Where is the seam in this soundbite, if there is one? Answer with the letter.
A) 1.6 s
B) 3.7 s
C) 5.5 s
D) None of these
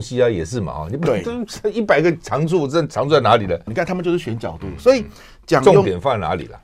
B